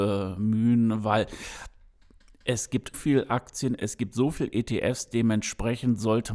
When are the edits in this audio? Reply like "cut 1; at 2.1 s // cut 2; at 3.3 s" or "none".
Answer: cut 1; at 2.9 s

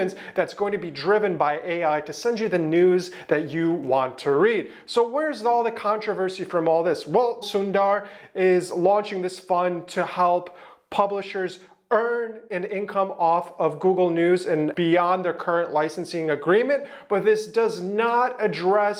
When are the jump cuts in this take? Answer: cut 1; at 7.4 s // cut 2; at 14.7 s

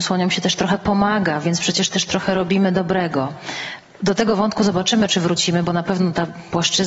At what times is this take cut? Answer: none

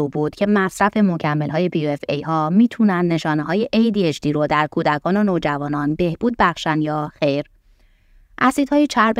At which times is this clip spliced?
cut 1; at 8.2 s

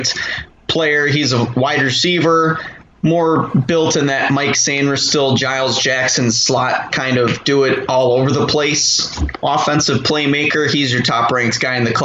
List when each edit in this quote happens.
none

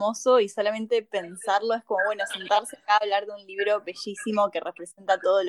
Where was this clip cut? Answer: none

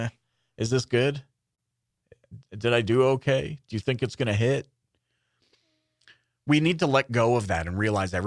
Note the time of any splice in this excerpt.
none

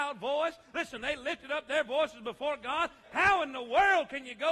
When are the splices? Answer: cut 1; at 3.0 s

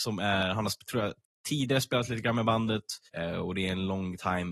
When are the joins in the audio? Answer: cut 1; at 3.1 s

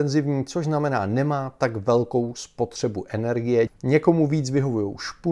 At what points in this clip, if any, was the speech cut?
cut 1; at 3.7 s

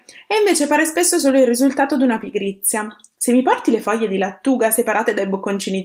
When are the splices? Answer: none

